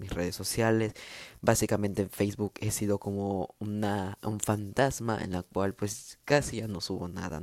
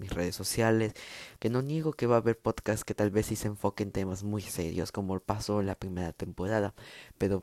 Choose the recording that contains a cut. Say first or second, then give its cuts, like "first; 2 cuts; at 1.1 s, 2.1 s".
second; 1 cut; at 1.4 s